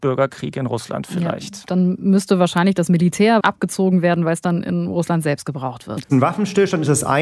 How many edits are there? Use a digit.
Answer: 2